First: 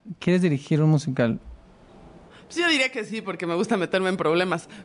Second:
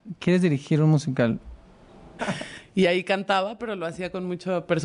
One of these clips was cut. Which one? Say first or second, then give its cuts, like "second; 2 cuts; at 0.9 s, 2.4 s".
second; 2 cuts; at 2.2 s, 3.6 s